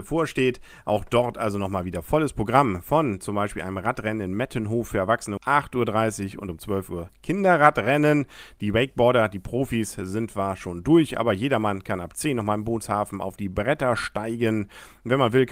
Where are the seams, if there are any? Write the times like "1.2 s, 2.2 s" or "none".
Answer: 5.4 s